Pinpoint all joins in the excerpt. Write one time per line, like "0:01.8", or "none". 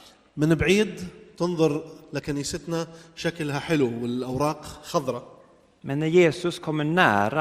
none